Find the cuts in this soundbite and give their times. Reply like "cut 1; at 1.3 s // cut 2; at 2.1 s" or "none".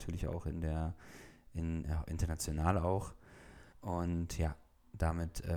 cut 1; at 3.7 s